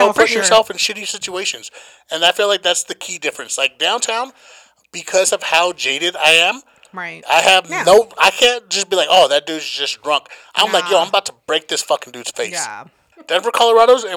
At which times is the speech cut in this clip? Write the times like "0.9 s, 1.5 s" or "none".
7.2 s, 13.1 s